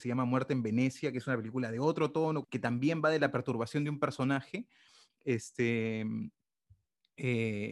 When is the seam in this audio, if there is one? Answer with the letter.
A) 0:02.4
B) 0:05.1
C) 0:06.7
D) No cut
A